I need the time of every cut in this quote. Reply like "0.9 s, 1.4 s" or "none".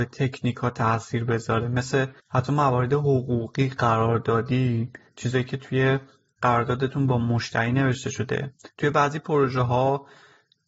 2.2 s